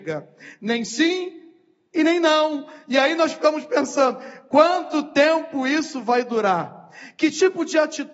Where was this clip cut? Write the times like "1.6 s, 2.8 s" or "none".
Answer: none